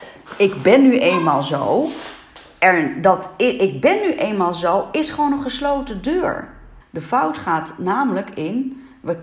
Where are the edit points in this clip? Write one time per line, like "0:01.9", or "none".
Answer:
0:06.8